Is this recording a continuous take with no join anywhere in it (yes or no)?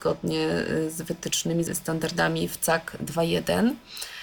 no